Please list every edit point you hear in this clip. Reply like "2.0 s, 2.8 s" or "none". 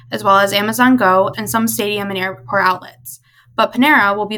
1.3 s